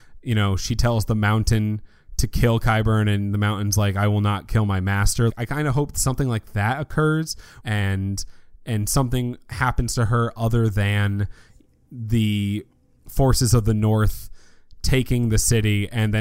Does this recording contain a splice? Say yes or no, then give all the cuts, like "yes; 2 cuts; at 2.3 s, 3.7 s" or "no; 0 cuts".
yes; 2 cuts; at 5.3 s, 7.6 s